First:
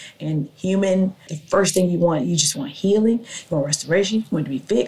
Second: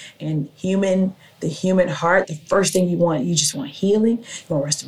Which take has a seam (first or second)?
first